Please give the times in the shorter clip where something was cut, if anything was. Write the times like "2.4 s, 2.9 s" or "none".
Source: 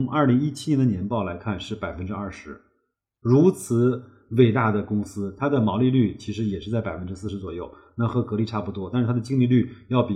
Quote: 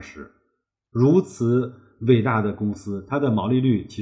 none